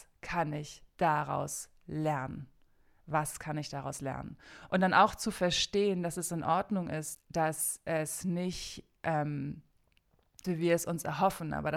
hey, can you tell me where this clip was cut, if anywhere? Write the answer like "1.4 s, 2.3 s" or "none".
7.1 s, 10.4 s

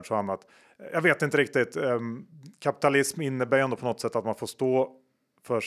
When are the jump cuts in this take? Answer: none

